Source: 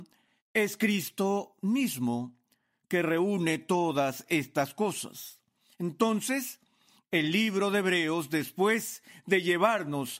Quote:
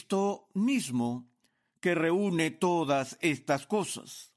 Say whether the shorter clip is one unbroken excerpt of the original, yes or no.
yes